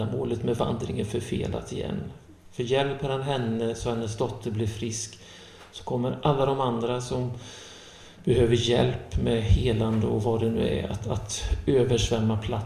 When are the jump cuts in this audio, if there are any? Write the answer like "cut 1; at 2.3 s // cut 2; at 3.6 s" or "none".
none